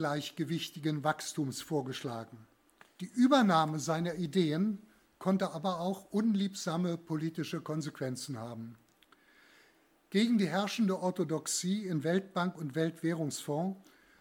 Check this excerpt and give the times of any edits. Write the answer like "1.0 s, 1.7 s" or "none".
2.8 s